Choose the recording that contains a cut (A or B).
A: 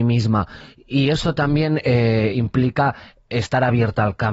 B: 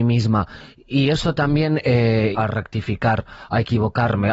B